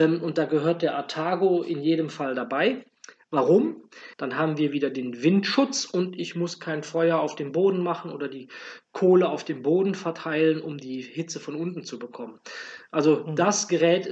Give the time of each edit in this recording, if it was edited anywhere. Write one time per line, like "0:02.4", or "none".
0:04.1